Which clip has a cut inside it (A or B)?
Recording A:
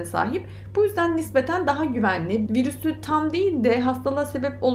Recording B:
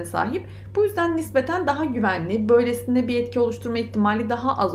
A